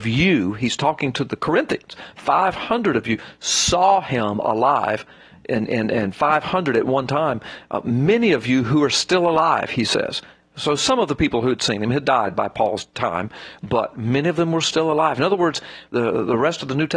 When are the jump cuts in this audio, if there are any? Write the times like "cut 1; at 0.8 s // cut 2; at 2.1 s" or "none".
cut 1; at 15.9 s